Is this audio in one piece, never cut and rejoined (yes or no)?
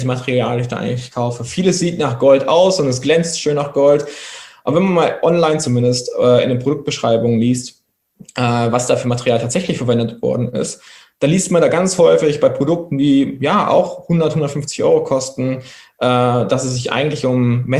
yes